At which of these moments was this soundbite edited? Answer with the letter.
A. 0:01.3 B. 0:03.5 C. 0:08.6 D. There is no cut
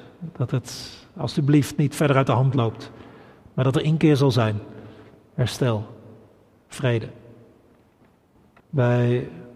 C